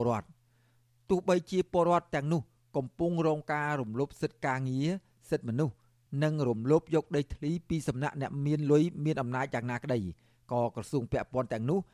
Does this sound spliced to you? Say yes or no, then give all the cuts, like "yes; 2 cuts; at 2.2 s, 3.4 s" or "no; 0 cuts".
no; 0 cuts